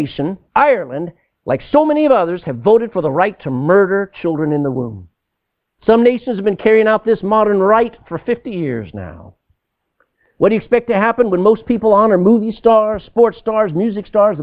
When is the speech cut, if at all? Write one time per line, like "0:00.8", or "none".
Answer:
0:05.7